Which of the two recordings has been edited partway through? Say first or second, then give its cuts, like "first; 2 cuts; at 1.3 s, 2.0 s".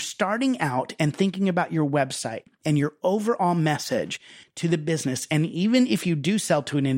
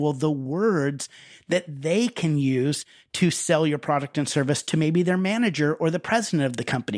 first; 1 cut; at 4.4 s